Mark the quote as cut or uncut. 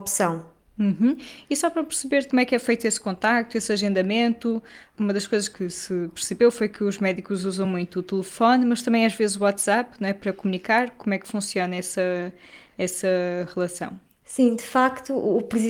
uncut